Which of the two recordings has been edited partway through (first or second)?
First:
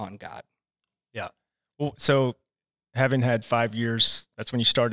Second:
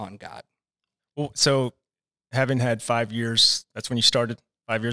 second